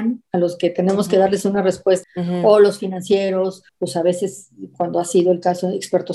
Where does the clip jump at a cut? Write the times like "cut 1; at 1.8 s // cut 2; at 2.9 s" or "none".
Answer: cut 1; at 2.0 s // cut 2; at 3.7 s